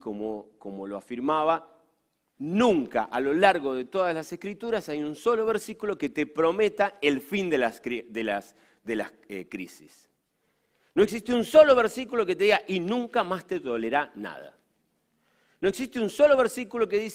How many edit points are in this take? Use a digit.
0